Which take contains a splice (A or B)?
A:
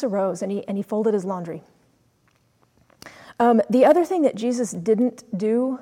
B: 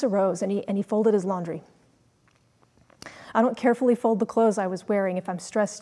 B